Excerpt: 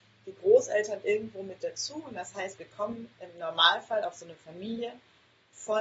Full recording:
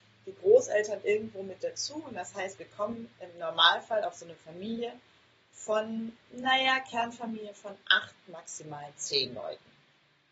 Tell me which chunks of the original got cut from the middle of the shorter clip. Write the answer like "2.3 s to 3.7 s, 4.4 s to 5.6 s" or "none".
none

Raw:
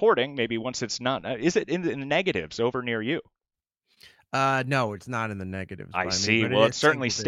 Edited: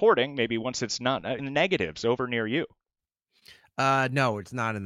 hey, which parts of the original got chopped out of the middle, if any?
1.4 s to 1.9 s

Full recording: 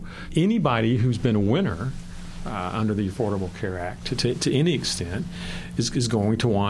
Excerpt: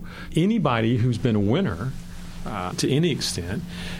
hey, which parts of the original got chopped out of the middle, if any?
2.7 s to 4.3 s

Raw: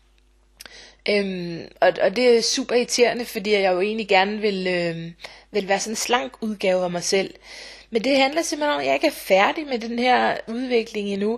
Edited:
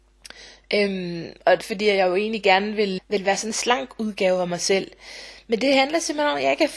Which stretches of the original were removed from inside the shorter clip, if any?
2.0 s to 3.3 s, 4.6 s to 5.4 s

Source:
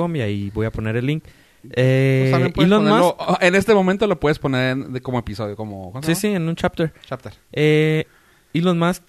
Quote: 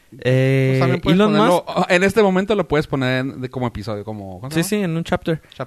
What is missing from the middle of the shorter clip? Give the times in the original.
none

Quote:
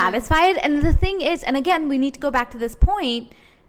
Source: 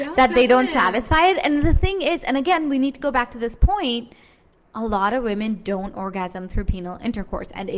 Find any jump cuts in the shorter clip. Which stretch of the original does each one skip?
none

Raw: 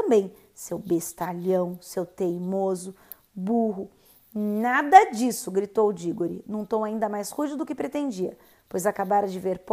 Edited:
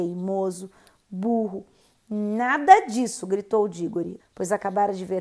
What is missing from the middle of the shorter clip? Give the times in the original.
6.4 s to 8.5 s

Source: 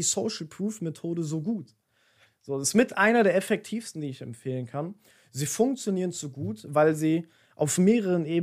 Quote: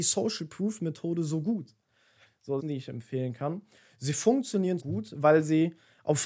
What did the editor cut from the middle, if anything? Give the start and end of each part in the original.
2.6 s to 3.9 s, 6.1 s to 6.3 s

